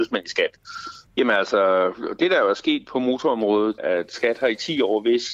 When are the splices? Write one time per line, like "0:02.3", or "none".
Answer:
0:01.1
0:03.8

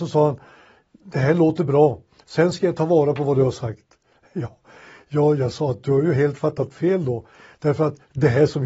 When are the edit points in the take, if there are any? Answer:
0:02.2

